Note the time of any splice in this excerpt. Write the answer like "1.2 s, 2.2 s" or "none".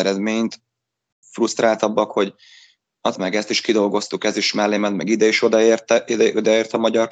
1.2 s, 3.2 s